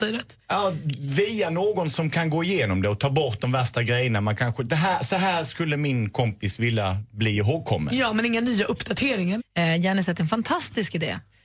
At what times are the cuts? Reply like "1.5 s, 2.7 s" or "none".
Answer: 9.4 s